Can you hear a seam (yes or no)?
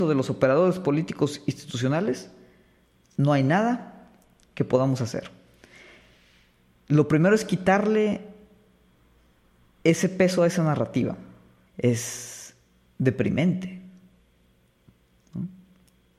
yes